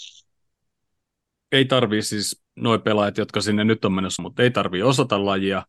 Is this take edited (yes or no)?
yes